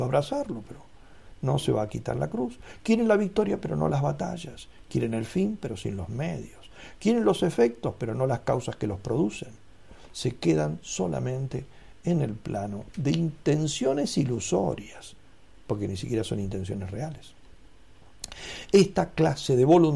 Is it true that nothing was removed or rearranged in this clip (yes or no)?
yes